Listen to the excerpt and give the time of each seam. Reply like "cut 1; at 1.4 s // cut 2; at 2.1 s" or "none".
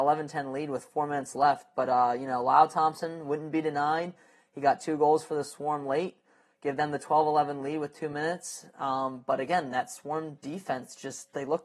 none